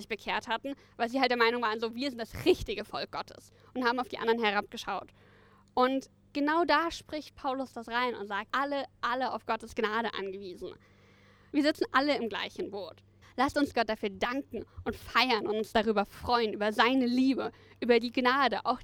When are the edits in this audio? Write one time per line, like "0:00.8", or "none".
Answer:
0:08.5
0:11.5
0:13.2

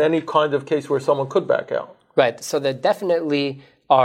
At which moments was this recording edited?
none

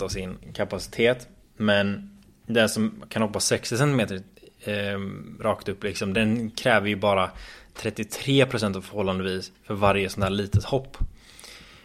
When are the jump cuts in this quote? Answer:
0:06.1

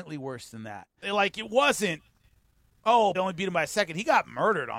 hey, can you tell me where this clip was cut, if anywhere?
0:01.0
0:03.1

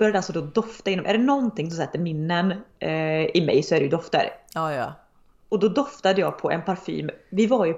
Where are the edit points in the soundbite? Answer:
none

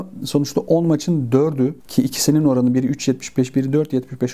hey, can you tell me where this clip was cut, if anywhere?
0:01.8

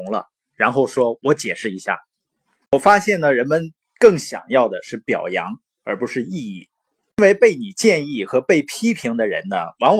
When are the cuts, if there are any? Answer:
none

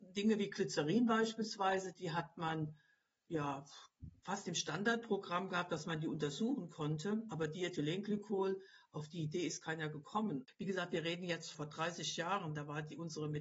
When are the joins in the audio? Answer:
0:11.5

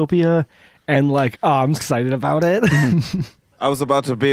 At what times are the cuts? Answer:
0:01.8

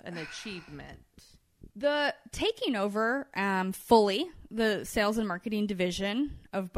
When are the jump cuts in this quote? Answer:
none

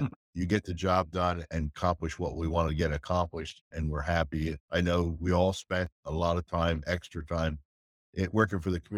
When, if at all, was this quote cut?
0:04.6

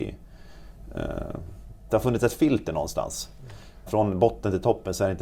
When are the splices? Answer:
0:01.9
0:03.9

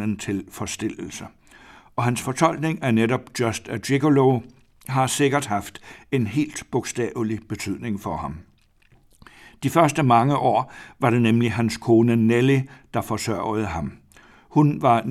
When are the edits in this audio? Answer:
none

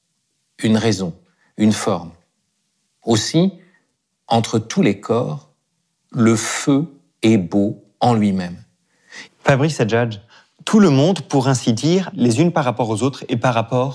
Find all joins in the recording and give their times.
0:09.3
0:12.1

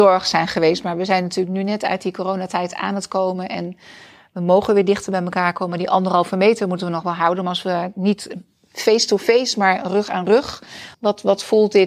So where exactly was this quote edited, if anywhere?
0:10.9

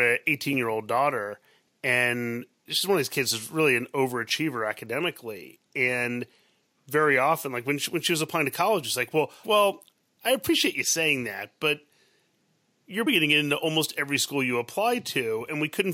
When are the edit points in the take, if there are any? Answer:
0:09.4
0:13.1

